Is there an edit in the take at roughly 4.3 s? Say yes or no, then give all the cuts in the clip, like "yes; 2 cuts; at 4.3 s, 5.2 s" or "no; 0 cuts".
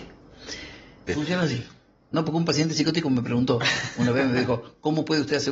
no; 1 cut; at 1.1 s